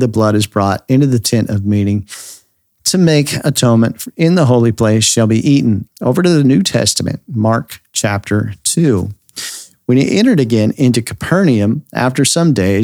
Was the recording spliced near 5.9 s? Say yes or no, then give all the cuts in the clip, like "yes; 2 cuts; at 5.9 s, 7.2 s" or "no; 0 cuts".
yes; 1 cut; at 5.9 s